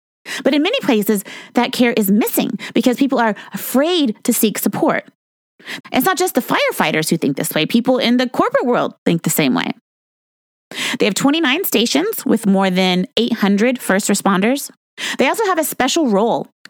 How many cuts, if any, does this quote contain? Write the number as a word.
two